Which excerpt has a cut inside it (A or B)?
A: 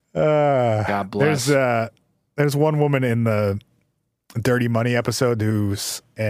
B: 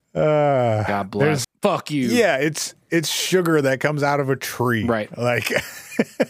B